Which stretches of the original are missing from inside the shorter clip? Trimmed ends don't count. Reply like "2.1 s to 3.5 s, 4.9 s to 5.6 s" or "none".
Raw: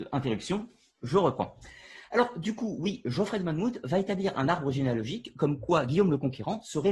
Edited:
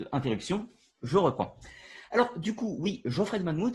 none